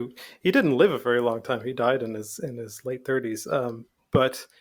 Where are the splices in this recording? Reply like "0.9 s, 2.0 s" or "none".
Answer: none